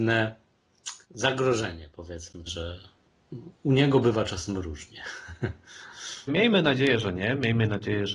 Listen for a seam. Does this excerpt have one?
yes; 3 cuts; at 1.0 s, 2.5 s, 6.3 s

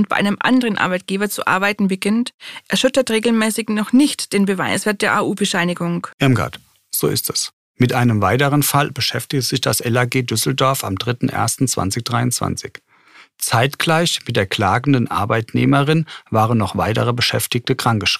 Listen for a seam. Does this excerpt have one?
yes; 1 cut; at 6.1 s

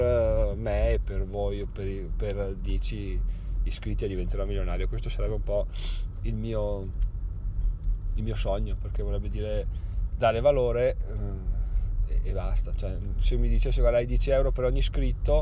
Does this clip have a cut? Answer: no; 0 cuts

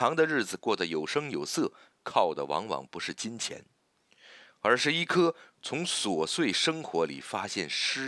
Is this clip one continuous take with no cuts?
yes; 0 cuts

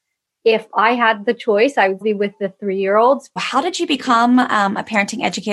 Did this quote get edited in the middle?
yes; 2 cuts; at 2.0 s, 3.4 s

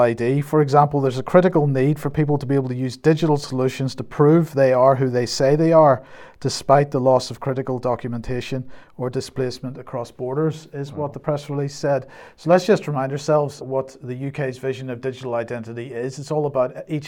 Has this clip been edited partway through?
yes; 1 cut; at 13.6 s

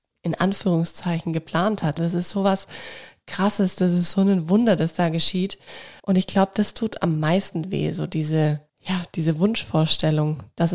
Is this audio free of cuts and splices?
no; 3 cuts; at 2.0 s, 6.0 s, 8.7 s

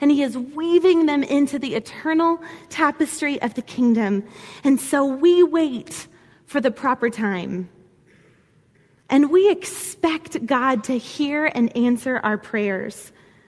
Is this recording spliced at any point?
no; 0 cuts

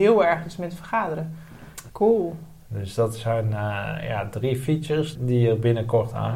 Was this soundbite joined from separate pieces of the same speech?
yes; 2 cuts; at 1.9 s, 5.2 s

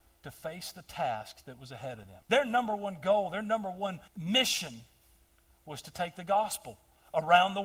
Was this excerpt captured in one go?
no; 2 cuts; at 2.2 s, 4.1 s

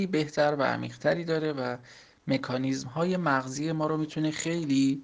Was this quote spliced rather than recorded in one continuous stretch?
no; 0 cuts

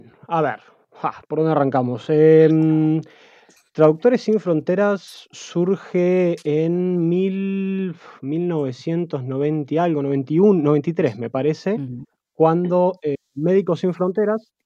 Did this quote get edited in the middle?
no; 0 cuts

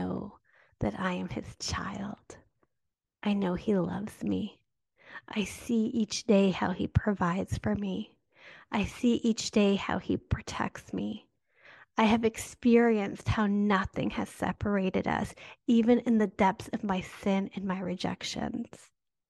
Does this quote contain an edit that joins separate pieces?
no; 0 cuts

